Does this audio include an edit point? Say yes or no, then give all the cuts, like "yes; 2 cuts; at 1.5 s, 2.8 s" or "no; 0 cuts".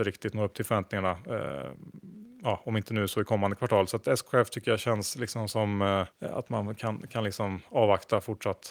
yes; 1 cut; at 6.1 s